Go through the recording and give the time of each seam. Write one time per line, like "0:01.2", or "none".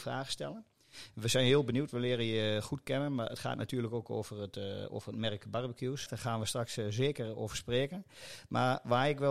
0:06.1